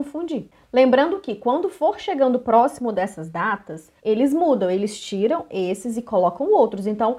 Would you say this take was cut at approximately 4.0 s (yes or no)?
yes